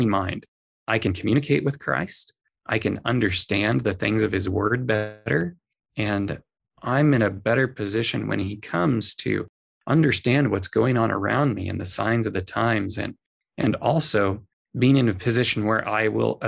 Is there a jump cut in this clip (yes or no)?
no